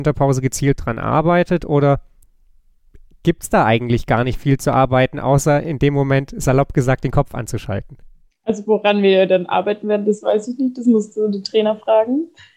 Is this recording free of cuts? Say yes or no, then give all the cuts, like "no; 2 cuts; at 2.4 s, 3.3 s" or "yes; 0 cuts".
yes; 0 cuts